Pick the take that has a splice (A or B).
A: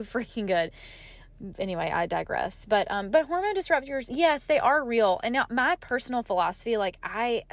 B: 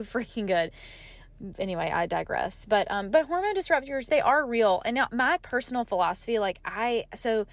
B